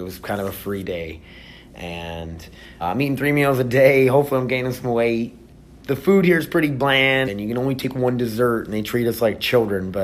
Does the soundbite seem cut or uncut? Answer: cut